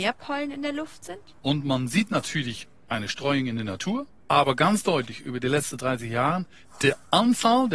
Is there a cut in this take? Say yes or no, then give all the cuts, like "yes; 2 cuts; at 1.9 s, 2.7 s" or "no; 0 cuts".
yes; 2 cuts; at 1.4 s, 4.2 s